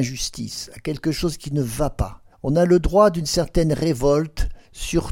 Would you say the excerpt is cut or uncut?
cut